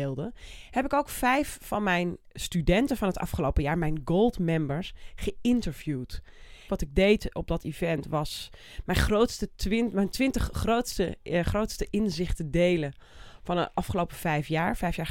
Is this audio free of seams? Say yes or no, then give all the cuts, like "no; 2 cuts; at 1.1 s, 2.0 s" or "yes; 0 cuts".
no; 1 cut; at 6.7 s